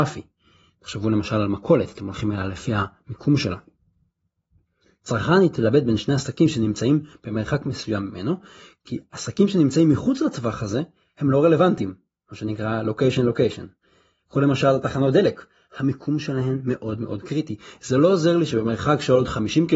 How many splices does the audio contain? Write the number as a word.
one